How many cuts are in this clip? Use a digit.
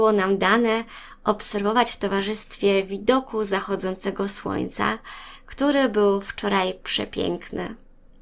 0